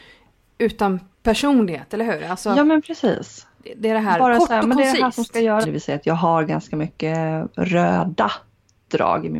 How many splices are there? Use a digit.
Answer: 2